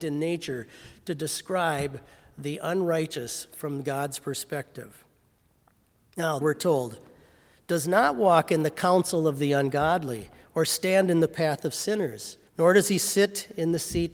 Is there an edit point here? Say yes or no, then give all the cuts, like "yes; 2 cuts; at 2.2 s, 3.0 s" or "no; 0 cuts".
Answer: yes; 2 cuts; at 6.4 s, 12.5 s